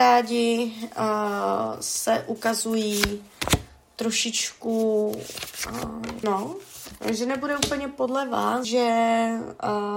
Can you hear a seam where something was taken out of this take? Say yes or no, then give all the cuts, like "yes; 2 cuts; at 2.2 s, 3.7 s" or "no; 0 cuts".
yes; 2 cuts; at 6.2 s, 8.6 s